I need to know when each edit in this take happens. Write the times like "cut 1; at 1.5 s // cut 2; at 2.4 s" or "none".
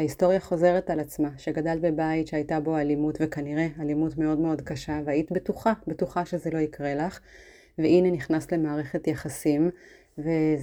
none